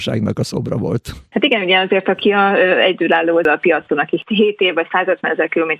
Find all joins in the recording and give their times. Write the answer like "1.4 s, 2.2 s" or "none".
1.3 s